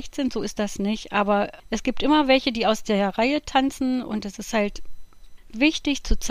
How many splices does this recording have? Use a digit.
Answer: 2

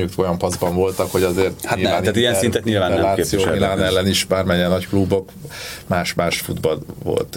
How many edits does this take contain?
0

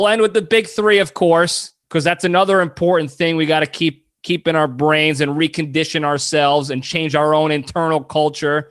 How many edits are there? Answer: 1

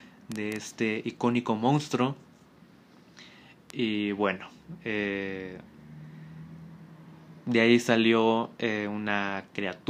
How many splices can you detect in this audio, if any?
0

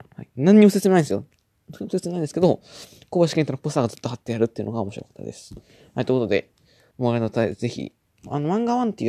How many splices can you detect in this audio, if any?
1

